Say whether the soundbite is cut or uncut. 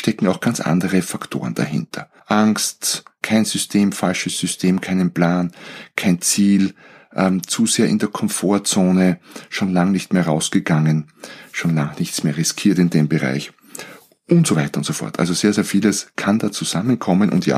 cut